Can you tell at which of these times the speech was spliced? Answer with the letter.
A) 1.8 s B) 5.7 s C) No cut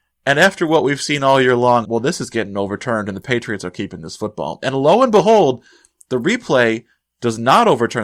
A